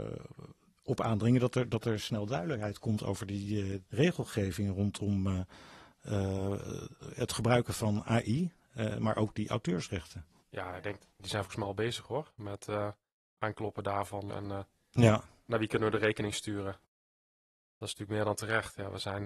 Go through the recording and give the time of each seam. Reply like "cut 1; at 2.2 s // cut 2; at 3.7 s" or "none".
cut 1; at 3.8 s // cut 2; at 14.3 s